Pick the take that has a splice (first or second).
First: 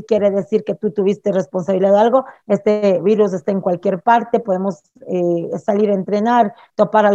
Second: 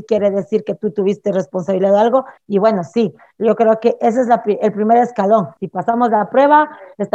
second